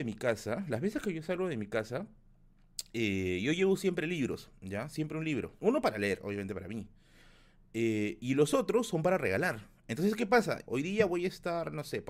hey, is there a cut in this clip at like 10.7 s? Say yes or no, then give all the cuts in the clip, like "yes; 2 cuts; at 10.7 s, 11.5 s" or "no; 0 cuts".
yes; 2 cuts; at 5.6 s, 10.7 s